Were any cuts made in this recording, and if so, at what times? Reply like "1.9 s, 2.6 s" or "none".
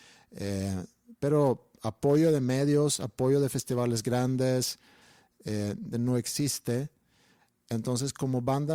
5.9 s